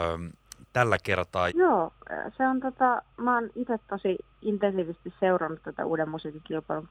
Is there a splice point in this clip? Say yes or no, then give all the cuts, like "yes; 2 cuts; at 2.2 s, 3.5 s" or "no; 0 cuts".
yes; 2 cuts; at 1.5 s, 3.1 s